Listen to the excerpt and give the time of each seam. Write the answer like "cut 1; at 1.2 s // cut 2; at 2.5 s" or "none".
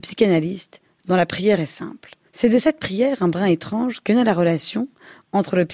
cut 1; at 2.3 s